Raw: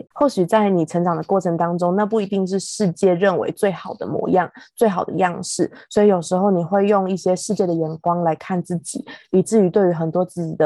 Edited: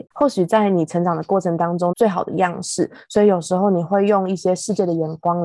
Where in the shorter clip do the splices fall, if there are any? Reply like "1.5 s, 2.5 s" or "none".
1.9 s